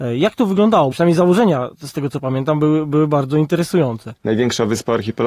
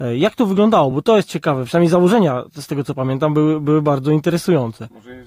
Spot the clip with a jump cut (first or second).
first